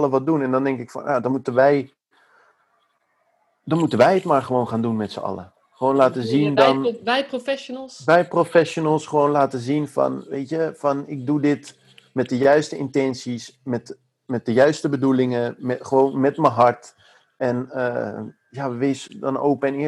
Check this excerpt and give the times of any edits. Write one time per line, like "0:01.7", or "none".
none